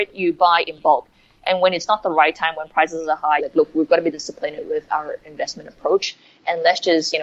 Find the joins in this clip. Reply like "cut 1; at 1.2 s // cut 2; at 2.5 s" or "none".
cut 1; at 3.4 s